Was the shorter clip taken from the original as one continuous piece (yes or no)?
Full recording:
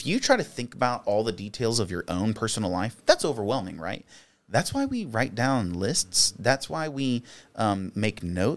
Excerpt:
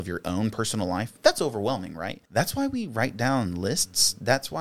no